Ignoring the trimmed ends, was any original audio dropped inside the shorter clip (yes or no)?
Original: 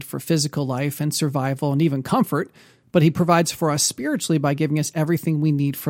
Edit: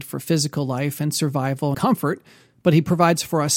yes